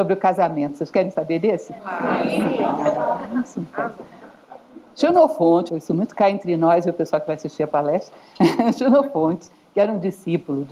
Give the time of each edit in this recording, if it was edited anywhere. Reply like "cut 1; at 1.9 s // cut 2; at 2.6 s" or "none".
cut 1; at 5.7 s